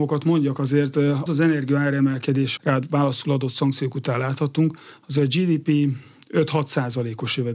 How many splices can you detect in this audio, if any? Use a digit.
2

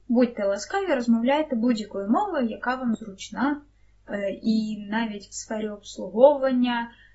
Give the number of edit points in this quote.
0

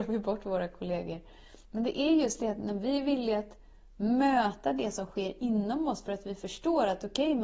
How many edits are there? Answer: 1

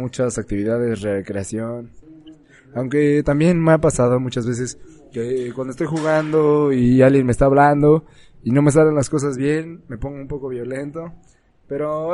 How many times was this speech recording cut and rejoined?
0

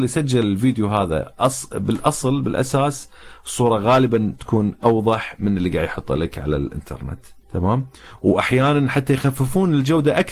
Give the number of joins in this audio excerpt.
0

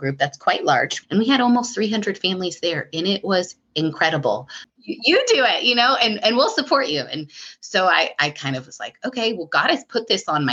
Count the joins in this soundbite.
2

